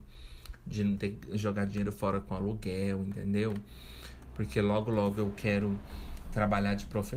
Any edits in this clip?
no; 0 cuts

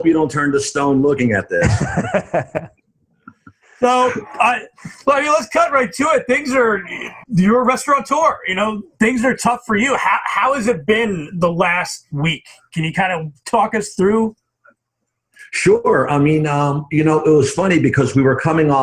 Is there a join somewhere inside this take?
yes; 1 cut; at 7.2 s

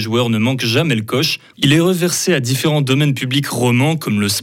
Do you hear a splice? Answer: yes; 1 cut; at 1.5 s

